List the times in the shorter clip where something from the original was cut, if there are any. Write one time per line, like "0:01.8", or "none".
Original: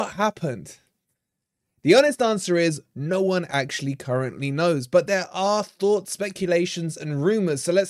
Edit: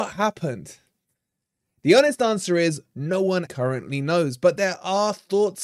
0:03.5